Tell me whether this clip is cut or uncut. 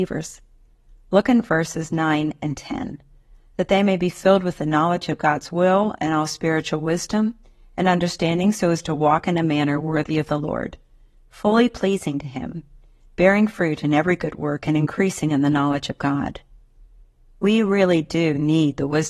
uncut